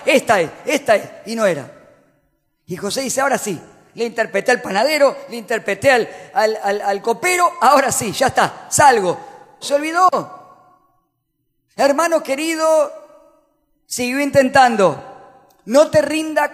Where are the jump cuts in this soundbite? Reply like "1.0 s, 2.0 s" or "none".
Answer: 9.6 s